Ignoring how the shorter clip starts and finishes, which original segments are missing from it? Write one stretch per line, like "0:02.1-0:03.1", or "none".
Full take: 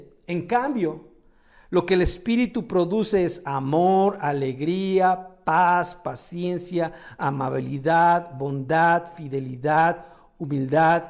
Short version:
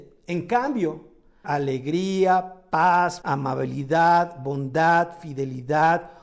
0:01.4-0:04.2
0:06.0-0:07.2